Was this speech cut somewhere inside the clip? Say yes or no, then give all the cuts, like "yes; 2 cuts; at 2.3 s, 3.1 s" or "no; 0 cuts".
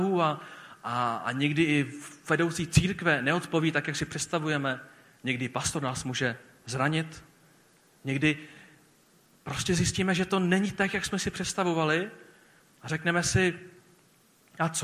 no; 0 cuts